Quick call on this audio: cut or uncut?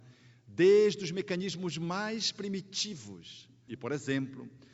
cut